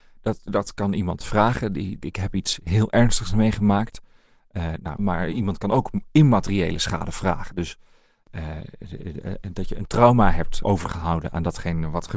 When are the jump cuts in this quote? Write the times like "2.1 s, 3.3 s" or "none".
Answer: 2.0 s, 5.0 s, 10.6 s